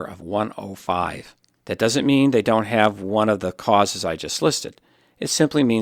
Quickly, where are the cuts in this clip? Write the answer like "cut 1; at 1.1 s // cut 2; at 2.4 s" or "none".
cut 1; at 1.6 s